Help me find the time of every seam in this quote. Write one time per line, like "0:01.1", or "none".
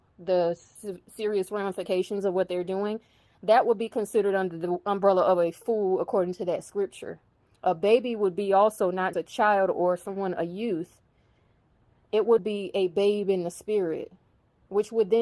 0:09.1
0:12.4